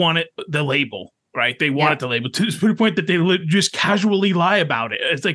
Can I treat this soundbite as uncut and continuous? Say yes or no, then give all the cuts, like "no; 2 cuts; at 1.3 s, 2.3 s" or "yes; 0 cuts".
yes; 0 cuts